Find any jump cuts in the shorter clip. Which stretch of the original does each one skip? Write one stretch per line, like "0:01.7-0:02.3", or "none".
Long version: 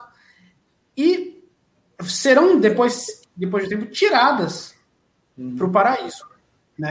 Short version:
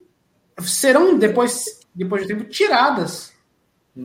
none